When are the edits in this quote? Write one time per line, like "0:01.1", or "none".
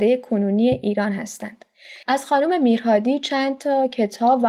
0:02.0